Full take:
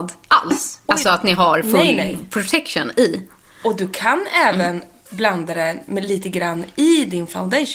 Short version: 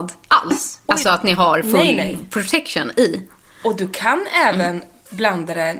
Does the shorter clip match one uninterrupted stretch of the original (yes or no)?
yes